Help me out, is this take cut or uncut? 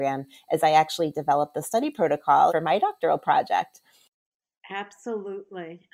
cut